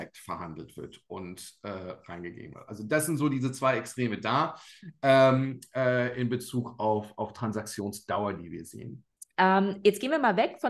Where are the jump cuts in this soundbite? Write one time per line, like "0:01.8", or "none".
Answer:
none

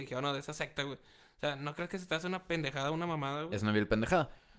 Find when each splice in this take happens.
none

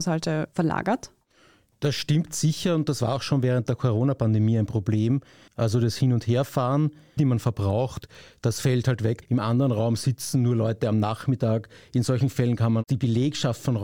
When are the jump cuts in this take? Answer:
0:05.5
0:07.2
0:09.2

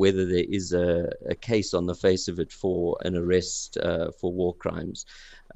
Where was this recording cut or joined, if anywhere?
0:03.0

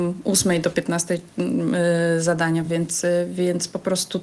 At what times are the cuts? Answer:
none

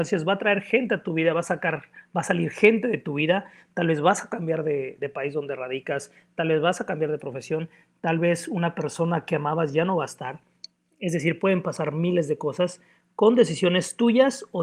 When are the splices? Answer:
0:05.0

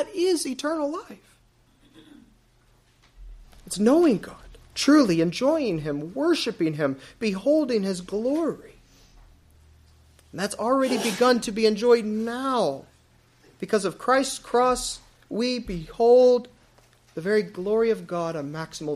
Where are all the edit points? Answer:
none

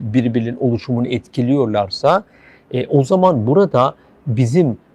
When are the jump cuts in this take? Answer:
none

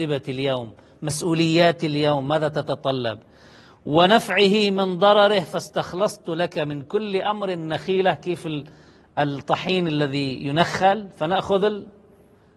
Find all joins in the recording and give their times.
none

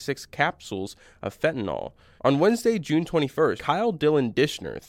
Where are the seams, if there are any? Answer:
0:02.2
0:03.6

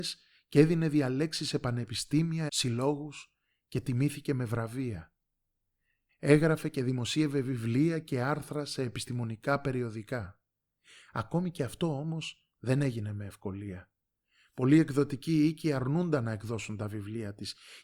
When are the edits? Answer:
0:02.5

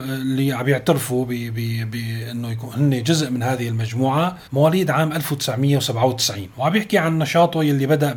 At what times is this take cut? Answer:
0:04.5

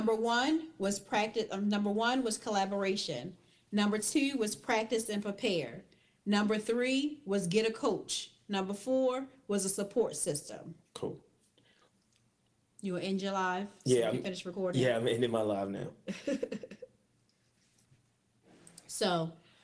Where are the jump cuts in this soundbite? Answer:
0:10.8

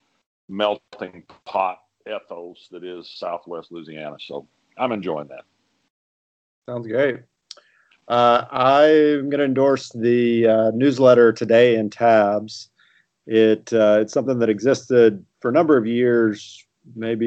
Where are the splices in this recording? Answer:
none

